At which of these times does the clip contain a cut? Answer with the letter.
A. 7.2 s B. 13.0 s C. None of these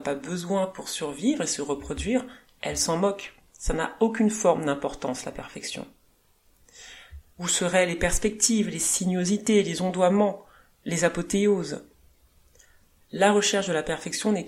A